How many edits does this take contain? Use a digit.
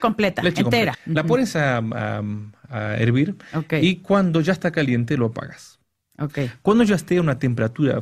1